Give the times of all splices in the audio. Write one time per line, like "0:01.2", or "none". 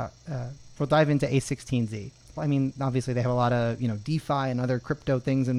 0:02.4